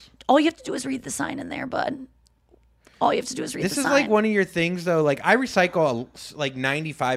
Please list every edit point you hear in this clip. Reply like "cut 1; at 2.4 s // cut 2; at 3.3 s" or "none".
none